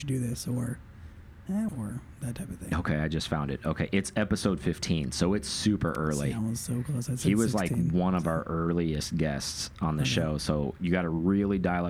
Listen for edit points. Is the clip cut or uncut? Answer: cut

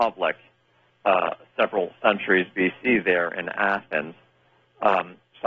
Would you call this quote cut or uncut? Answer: uncut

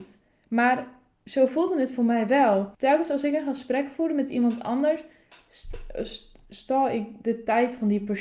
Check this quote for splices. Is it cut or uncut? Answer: cut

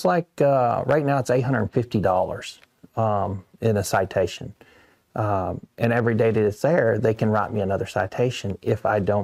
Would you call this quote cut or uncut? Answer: uncut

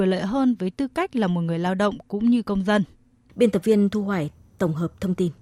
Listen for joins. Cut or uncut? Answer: cut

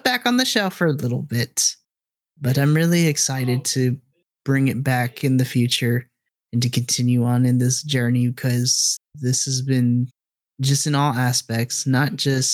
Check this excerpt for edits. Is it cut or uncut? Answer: uncut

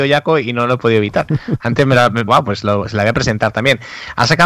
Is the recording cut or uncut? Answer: cut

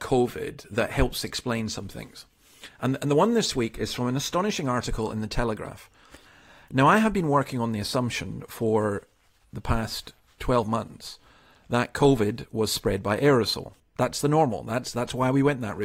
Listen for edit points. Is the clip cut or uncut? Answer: cut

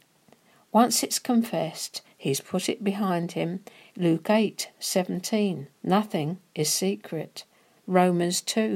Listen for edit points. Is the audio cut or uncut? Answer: cut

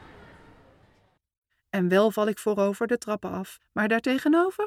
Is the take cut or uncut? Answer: cut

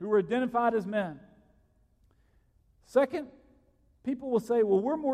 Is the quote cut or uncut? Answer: uncut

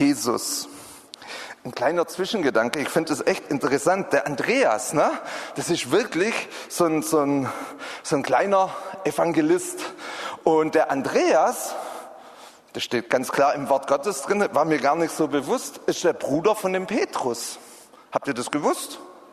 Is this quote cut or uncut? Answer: uncut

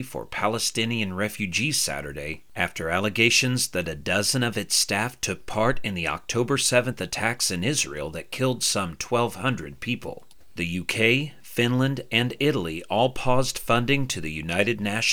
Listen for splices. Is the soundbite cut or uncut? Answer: uncut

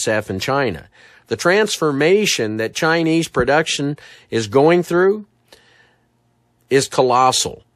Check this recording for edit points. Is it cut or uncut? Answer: uncut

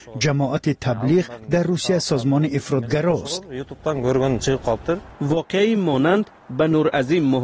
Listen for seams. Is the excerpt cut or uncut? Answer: cut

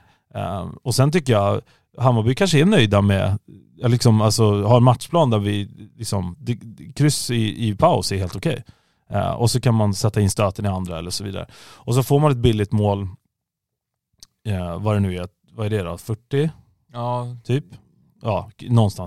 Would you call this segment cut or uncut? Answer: uncut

